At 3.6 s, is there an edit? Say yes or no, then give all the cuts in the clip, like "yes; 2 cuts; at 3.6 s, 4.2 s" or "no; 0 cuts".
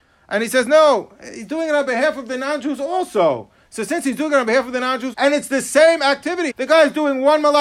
no; 2 cuts; at 5.1 s, 6.5 s